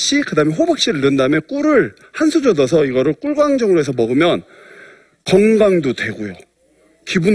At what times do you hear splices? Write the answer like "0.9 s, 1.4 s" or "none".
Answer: none